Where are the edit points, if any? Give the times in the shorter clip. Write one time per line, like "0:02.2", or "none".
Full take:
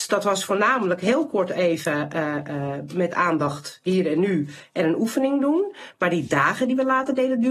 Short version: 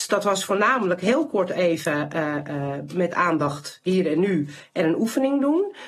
none